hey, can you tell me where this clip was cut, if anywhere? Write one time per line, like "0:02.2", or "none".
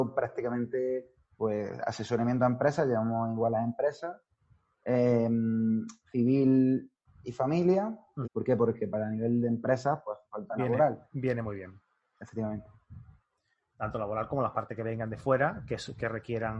0:01.4
0:08.2

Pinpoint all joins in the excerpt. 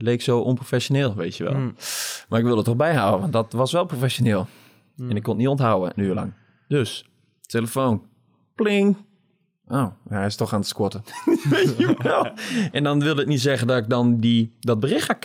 0:12.7

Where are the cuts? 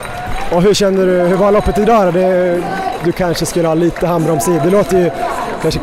0:03.0

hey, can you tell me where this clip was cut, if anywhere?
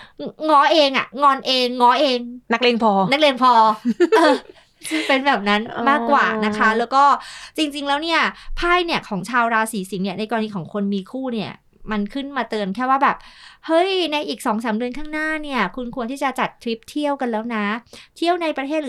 none

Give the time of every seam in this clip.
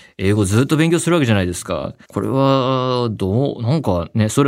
0:02.0

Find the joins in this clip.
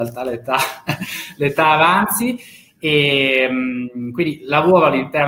none

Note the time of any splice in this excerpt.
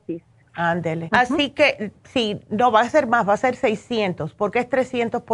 0:01.1

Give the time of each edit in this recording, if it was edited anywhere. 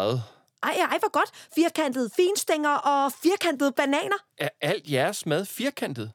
0:01.5
0:04.3

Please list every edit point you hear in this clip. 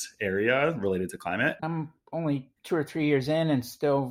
0:01.6

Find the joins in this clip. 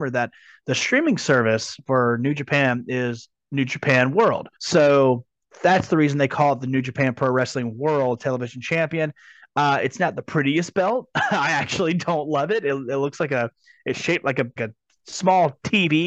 0:04.6
0:14.6

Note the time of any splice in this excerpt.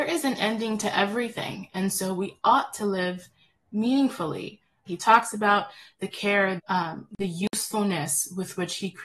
0:04.9
0:06.6

